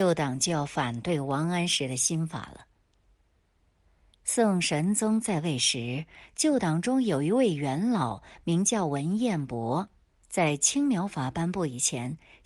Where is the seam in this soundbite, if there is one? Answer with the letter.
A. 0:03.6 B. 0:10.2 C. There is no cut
B